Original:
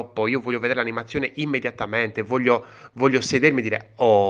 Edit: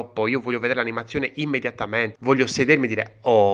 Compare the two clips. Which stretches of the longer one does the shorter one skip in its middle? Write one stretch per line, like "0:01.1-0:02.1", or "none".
0:02.1-0:02.9